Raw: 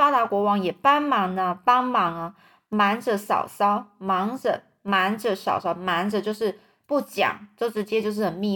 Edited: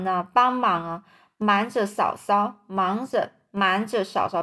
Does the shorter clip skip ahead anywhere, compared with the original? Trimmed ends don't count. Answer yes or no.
no